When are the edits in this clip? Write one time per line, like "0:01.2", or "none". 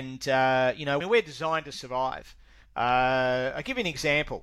0:01.0

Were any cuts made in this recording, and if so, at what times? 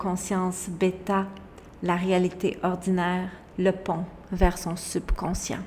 0:03.5

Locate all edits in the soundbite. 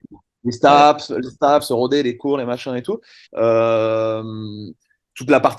0:03.3

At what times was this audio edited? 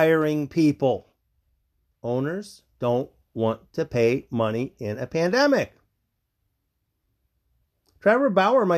none

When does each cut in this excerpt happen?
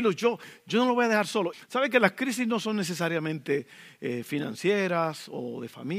0:01.5

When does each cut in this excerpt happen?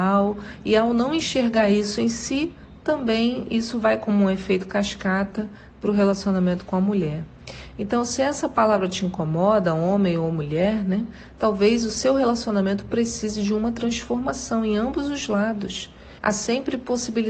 0:16.2

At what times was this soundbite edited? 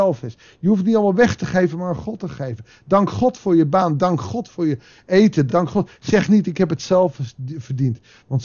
none

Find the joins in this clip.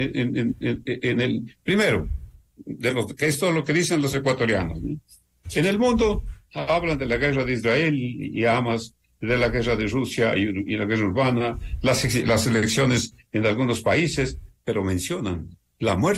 none

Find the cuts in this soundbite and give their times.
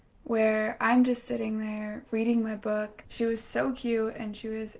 0:03.0

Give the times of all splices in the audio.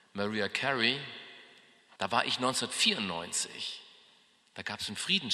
0:02.0

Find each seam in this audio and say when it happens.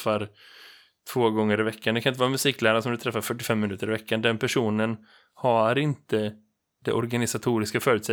none

